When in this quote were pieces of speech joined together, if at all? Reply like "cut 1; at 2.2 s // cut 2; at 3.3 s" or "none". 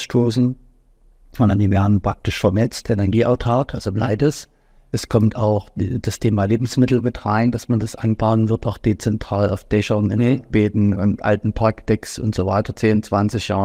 cut 1; at 4.8 s // cut 2; at 12.7 s